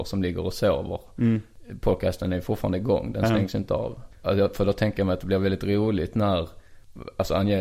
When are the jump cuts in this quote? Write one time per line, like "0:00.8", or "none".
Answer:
none